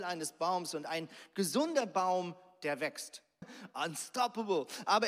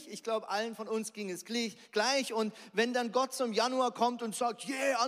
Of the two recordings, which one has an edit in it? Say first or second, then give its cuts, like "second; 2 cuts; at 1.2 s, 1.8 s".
first; 1 cut; at 3.4 s